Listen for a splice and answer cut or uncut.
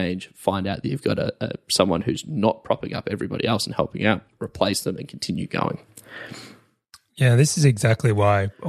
uncut